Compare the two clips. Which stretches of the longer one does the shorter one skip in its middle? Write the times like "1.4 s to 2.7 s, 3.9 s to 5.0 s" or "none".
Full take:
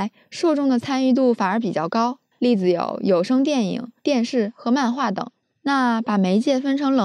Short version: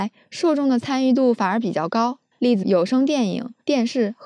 2.6 s to 3.0 s